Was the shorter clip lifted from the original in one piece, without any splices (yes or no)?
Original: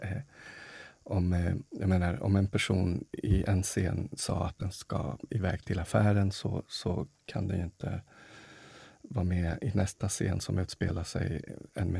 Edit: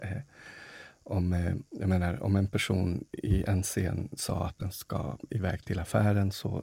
yes